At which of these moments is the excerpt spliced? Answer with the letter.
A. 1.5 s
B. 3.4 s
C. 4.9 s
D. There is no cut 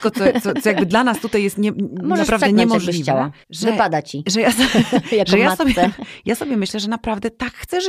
B